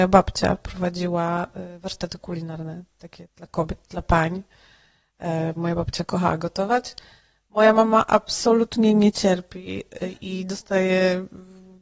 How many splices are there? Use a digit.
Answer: 1